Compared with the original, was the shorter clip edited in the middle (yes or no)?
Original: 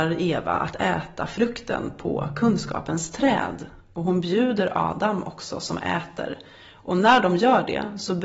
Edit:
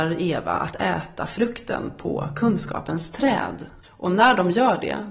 yes